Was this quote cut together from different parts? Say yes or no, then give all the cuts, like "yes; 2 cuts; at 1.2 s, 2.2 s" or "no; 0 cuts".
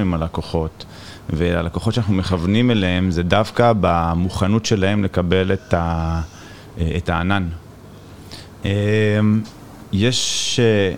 yes; 1 cut; at 8.6 s